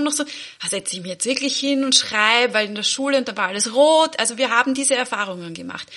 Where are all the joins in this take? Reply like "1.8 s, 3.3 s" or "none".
none